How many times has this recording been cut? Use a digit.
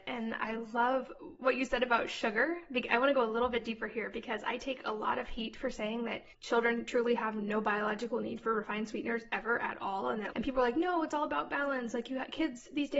2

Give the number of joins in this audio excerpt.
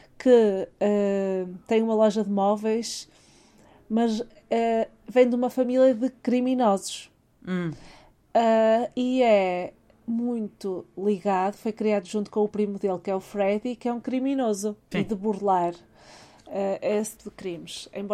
2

